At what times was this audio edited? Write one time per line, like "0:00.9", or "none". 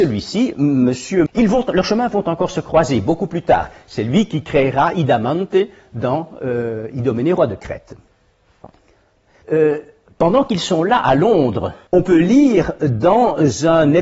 0:01.3
0:09.4
0:11.9